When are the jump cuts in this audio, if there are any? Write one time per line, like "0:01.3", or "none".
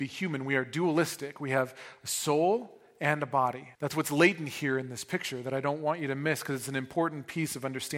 0:03.7

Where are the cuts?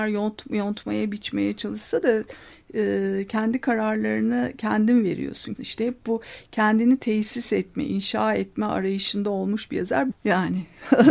0:05.5
0:10.1

